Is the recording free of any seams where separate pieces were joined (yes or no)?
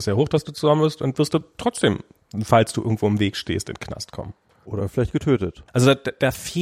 no